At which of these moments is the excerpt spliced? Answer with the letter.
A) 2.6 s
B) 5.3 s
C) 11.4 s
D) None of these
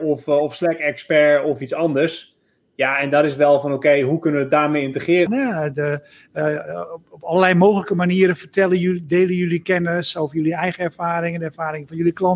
B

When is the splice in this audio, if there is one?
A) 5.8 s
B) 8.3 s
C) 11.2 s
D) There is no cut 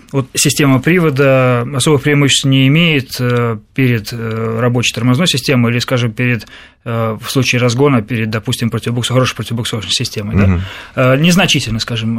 D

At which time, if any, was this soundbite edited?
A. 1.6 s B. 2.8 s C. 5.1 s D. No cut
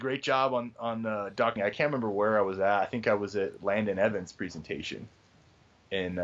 A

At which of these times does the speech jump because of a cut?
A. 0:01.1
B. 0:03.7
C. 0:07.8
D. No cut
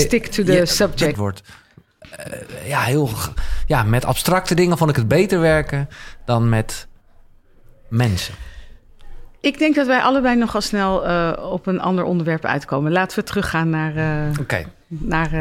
A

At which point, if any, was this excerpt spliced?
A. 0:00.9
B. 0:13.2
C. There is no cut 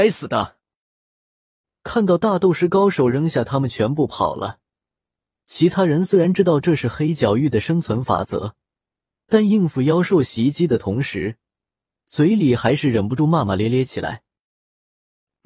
C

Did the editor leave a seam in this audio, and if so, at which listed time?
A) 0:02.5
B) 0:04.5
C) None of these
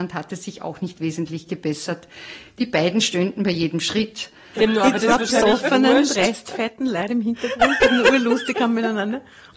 B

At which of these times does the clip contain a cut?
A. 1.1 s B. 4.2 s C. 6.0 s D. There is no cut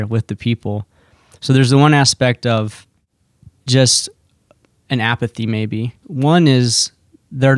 C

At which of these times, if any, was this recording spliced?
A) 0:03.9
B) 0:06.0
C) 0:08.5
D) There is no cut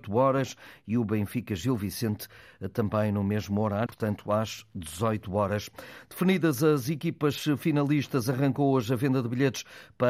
A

